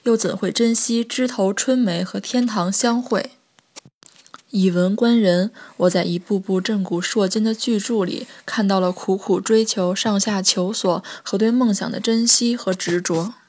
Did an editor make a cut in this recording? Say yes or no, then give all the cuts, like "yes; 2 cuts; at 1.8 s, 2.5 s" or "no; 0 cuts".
no; 0 cuts